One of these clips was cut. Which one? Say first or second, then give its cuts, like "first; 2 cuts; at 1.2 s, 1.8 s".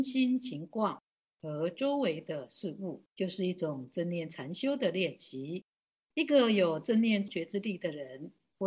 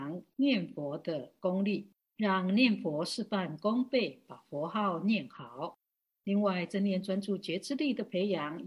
first; 2 cuts; at 6.1 s, 7.3 s